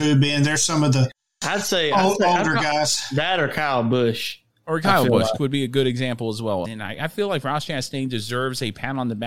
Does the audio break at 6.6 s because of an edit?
yes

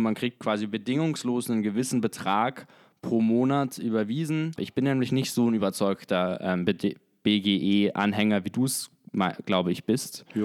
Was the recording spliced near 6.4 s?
no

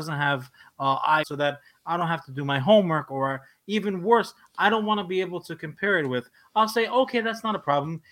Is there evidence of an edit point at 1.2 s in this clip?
yes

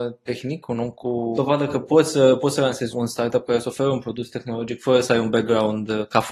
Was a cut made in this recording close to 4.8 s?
no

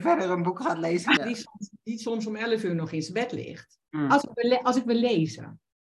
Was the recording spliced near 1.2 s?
yes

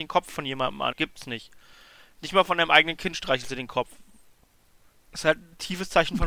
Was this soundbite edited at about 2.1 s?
no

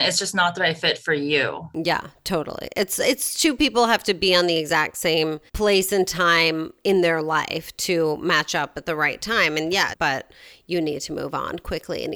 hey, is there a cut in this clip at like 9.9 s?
yes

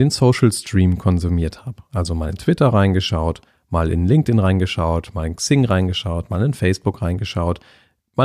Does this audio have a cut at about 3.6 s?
no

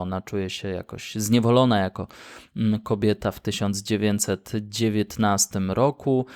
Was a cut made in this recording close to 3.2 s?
no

